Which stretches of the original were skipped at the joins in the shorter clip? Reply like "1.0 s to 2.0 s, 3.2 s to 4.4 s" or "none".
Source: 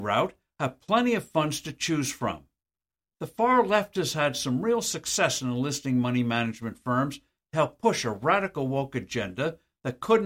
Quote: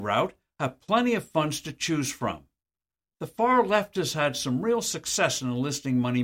none